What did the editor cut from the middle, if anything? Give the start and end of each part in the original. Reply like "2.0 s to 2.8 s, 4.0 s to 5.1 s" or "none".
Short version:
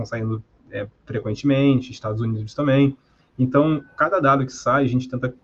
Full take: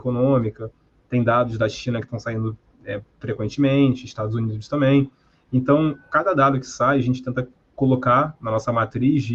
none

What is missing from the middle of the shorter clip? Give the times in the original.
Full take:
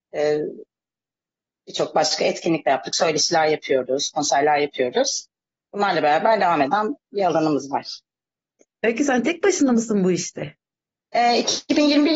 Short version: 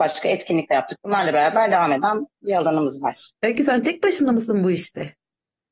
2.9 s to 5.6 s, 8.0 s to 8.7 s

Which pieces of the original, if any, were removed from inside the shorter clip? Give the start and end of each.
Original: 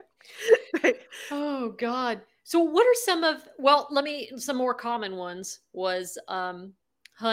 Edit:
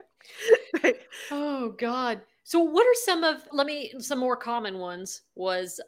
3.5 s to 3.9 s

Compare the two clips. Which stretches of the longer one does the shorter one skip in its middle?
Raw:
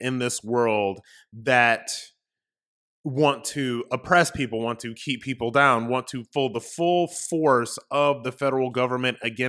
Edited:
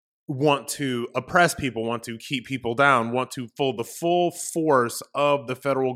none

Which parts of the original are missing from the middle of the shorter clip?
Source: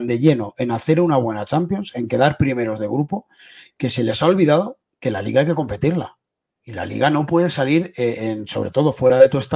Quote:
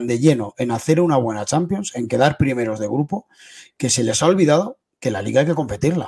none

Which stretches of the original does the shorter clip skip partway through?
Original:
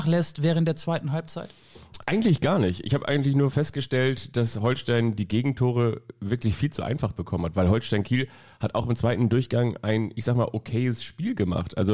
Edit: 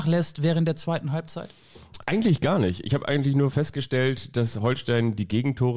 none

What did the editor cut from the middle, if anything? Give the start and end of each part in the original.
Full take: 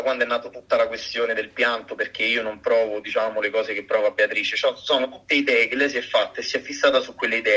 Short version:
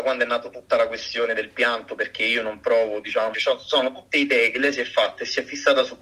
3.3 s to 4.5 s

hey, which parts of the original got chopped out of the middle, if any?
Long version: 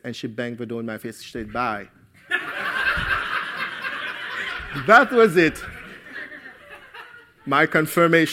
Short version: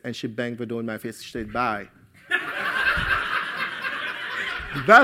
none

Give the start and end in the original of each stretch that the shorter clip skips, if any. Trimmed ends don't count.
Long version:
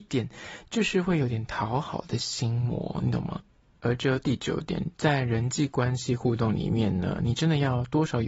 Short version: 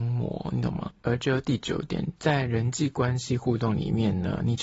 3.5 s to 3.8 s

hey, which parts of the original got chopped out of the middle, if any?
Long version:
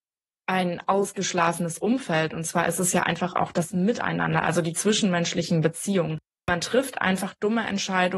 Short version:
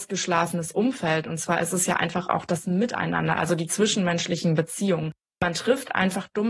none

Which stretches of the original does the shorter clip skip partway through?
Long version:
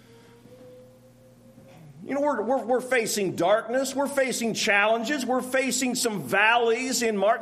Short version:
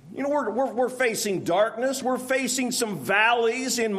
3.9 s to 5.3 s

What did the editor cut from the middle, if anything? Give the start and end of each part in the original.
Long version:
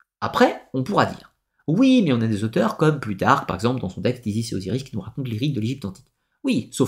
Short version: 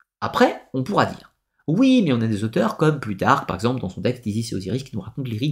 none

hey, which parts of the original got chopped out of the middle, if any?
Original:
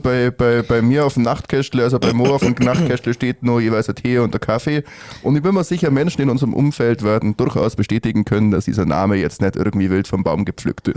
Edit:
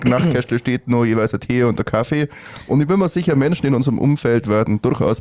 none

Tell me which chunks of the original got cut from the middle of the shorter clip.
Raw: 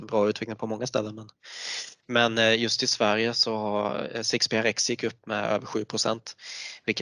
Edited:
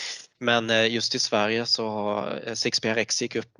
none

